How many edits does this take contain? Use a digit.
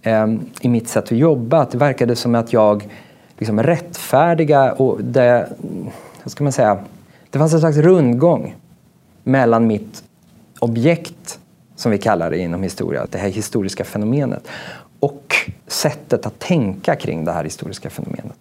2